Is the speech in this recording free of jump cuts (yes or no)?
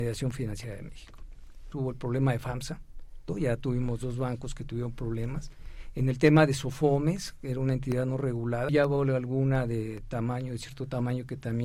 no